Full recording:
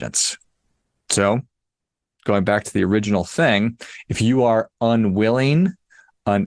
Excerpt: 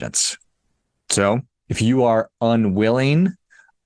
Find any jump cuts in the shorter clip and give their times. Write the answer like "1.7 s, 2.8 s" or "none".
1.7 s